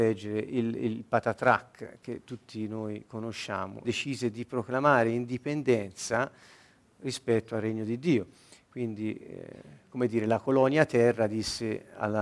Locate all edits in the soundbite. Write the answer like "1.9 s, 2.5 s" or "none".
3.8 s